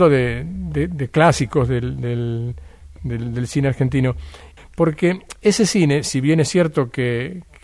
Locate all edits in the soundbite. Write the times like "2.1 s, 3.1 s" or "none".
4.6 s